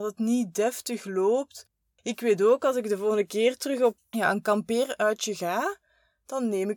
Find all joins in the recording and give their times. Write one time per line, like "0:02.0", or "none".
0:04.0